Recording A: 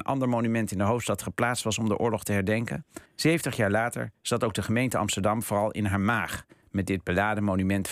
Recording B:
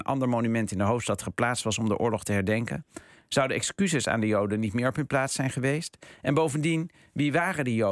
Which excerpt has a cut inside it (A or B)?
A